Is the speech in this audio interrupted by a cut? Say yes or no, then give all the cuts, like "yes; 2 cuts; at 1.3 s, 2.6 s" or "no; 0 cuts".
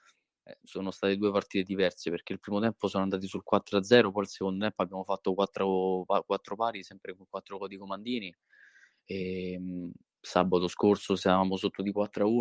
no; 0 cuts